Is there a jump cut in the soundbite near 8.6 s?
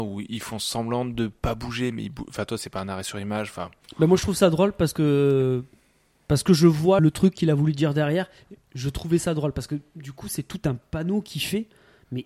no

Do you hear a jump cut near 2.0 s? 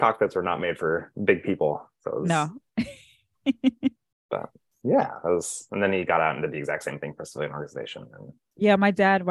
no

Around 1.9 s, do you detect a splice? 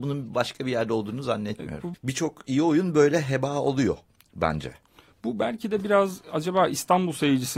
yes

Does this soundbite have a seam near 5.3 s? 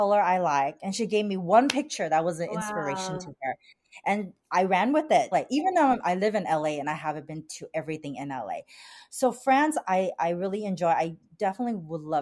yes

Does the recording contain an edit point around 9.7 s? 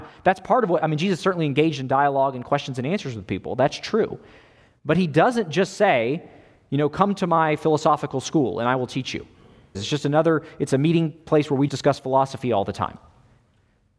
yes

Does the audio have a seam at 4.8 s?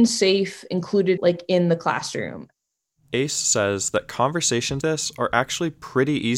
yes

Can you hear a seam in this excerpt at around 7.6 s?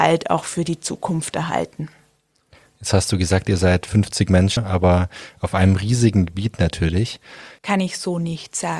yes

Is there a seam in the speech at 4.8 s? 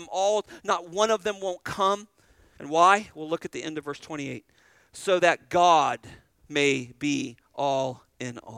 no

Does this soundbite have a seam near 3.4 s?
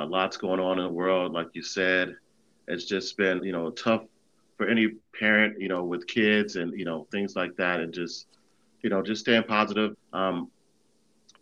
yes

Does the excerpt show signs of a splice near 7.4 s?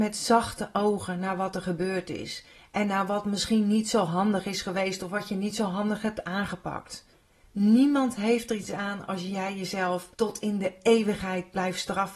yes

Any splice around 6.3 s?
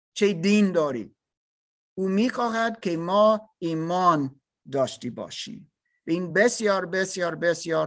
no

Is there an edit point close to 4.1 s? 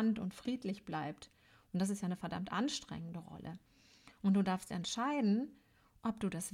no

